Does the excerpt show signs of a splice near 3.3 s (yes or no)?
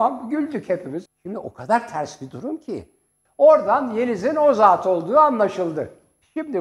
yes